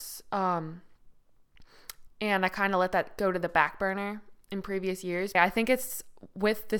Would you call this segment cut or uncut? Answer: cut